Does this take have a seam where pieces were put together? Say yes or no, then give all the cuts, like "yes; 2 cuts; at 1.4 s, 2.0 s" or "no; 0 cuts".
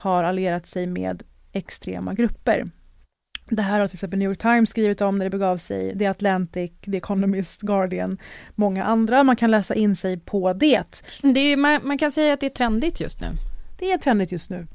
no; 0 cuts